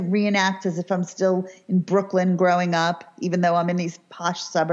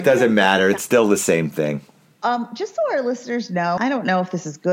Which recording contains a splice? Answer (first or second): second